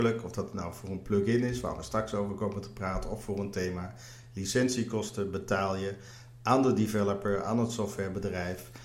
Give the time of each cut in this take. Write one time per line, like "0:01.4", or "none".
none

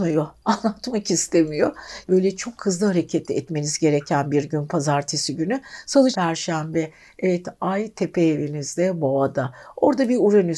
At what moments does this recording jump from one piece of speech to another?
0:02.0
0:06.1

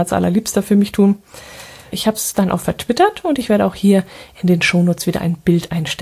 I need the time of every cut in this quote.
0:01.9

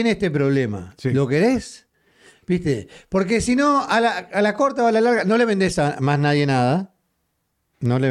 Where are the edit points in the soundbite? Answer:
none

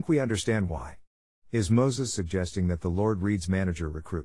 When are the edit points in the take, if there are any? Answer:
0:01.4

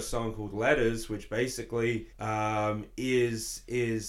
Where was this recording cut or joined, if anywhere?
0:02.1

